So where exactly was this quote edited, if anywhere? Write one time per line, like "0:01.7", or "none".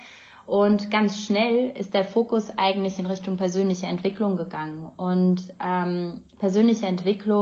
none

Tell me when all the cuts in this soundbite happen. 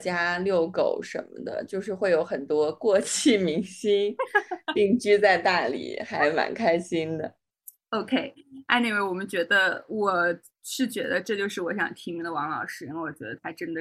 none

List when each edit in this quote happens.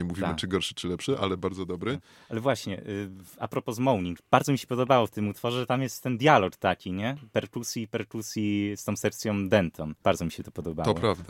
0:10.0

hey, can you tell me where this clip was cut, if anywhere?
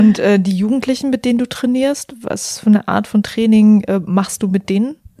none

